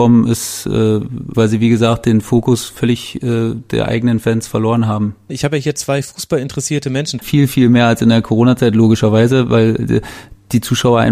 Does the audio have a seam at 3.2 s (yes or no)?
no